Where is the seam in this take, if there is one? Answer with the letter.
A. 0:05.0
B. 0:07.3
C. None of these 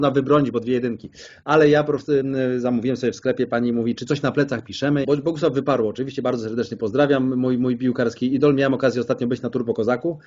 A